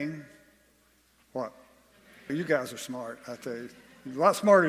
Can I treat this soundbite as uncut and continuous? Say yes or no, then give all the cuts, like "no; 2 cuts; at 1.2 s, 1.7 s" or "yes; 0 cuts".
no; 1 cut; at 2.3 s